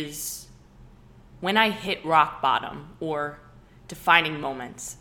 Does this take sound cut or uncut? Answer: uncut